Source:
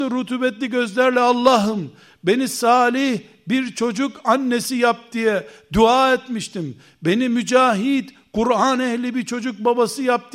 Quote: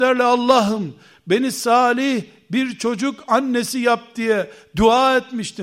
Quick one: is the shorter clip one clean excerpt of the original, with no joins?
yes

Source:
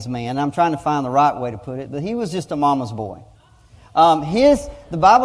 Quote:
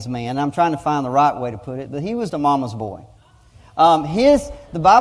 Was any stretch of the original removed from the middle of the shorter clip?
yes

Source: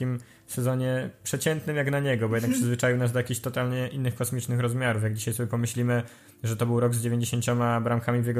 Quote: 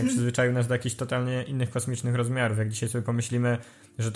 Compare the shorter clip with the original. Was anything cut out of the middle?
no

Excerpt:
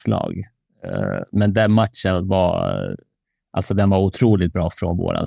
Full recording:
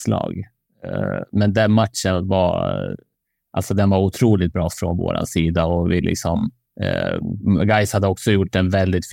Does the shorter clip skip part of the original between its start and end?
no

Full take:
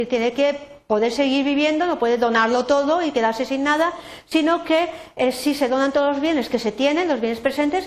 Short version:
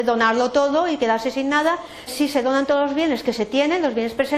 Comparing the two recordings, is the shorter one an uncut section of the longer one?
no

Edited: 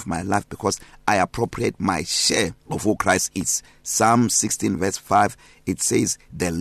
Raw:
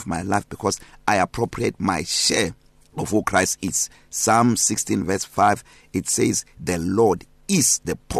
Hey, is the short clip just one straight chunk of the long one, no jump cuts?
no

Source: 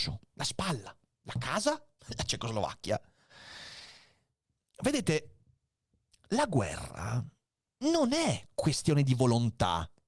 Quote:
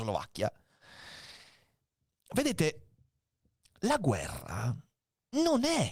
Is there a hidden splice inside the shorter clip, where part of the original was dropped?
no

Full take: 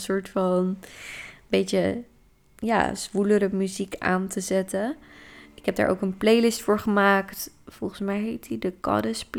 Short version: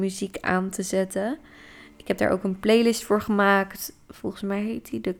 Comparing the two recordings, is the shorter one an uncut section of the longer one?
yes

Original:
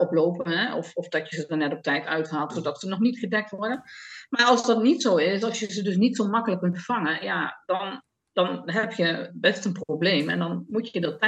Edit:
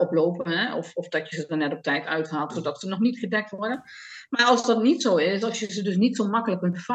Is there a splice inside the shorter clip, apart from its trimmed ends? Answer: no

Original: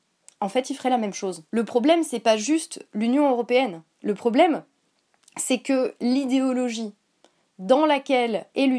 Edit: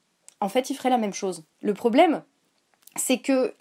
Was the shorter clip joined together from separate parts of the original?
yes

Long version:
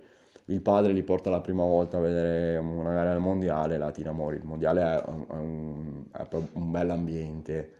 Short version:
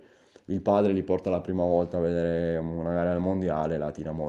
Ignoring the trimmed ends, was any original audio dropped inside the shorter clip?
no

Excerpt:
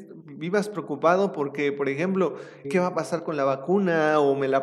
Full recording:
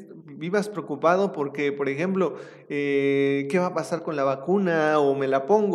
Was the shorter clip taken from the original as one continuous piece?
no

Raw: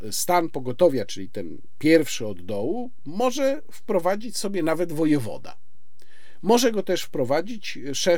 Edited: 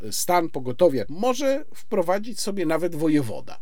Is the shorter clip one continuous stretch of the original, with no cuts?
no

